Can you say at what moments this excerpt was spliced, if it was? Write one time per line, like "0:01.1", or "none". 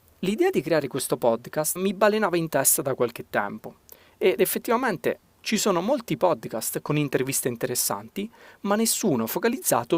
0:01.8